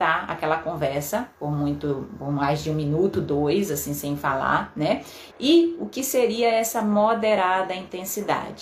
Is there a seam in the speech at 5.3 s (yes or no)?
yes